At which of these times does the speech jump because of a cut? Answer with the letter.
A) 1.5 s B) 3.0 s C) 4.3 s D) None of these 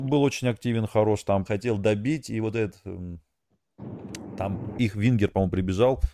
A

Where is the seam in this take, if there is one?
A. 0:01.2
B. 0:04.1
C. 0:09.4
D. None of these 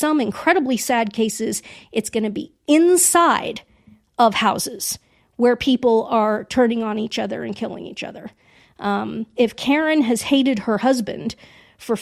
C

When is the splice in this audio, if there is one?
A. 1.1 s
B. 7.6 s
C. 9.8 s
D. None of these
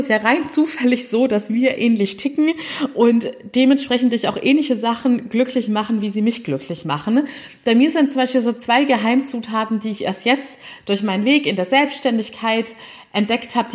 D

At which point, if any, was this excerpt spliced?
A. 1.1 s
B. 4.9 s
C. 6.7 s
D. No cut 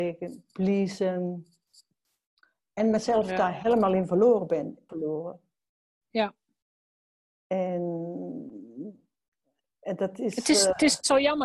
B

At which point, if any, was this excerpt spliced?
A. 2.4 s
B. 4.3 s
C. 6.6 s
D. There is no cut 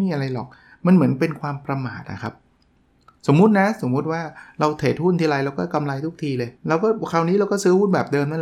C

